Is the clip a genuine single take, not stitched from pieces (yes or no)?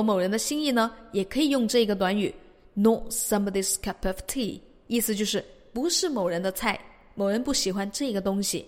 yes